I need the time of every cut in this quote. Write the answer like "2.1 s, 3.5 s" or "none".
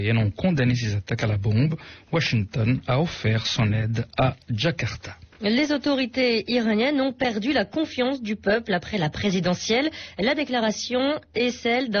none